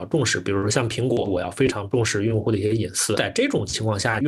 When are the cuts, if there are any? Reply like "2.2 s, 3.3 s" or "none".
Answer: 1.2 s